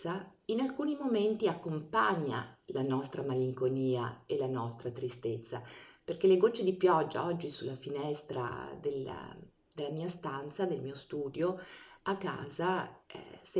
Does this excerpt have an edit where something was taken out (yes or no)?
no